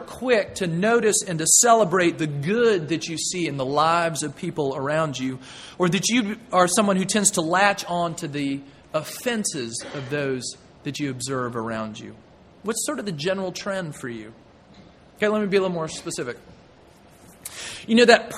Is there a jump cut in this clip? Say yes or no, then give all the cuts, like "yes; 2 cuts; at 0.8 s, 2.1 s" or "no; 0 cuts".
no; 0 cuts